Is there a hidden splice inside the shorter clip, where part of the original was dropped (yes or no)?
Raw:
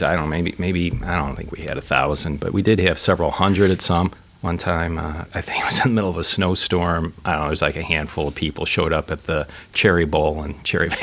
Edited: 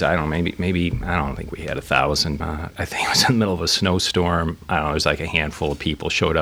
yes